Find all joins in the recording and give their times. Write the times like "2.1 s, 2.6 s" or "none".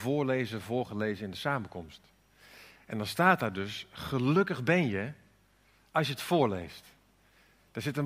none